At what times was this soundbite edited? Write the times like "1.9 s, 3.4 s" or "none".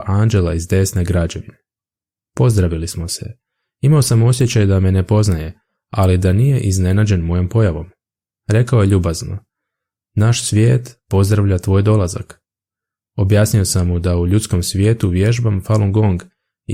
none